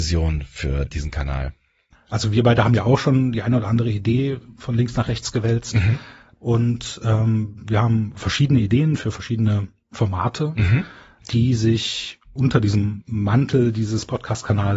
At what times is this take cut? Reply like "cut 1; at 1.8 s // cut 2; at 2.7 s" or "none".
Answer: none